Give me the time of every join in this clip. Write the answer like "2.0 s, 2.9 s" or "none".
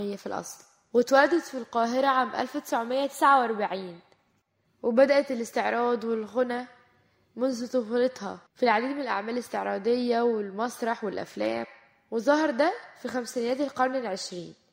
8.5 s